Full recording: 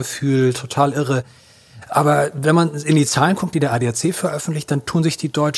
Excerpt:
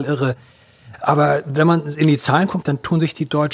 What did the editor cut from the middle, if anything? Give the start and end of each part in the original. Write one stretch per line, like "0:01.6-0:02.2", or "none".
0:03.5-0:04.7

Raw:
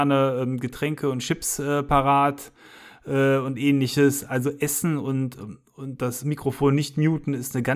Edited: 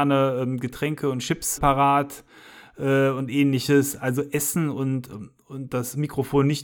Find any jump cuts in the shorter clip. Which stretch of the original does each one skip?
0:01.6-0:01.8

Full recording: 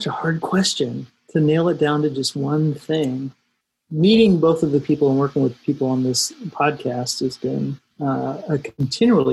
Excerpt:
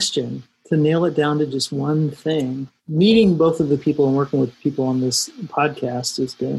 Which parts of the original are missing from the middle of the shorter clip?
0:03.4-0:03.8

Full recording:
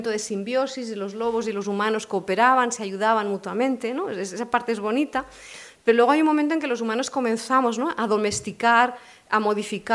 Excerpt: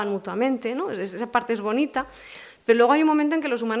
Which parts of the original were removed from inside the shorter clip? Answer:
none

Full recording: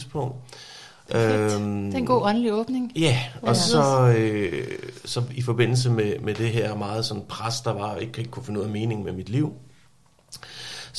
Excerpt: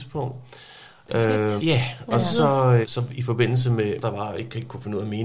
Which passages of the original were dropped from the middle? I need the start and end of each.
0:01.6-0:02.9
0:04.2-0:05.0
0:06.2-0:07.6

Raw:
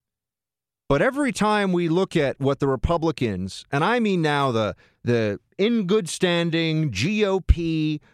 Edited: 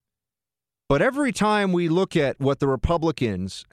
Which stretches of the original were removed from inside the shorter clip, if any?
none

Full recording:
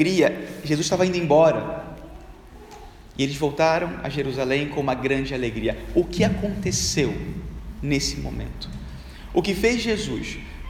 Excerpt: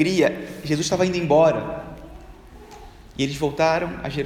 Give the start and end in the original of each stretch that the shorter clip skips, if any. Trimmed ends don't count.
none

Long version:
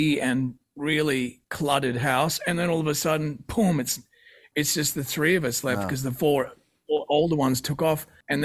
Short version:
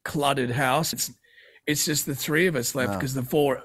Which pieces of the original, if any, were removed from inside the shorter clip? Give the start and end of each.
0:02.4-0:03.8

